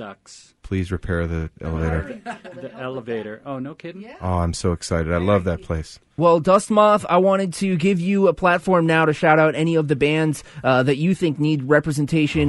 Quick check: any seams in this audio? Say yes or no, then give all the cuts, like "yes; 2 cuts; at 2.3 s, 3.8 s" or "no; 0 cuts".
yes; 1 cut; at 6.2 s